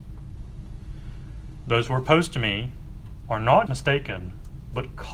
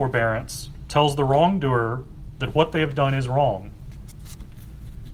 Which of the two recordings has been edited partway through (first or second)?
first